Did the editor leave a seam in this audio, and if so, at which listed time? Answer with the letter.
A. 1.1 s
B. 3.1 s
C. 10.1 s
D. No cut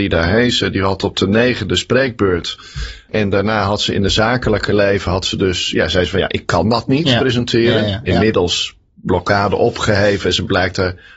B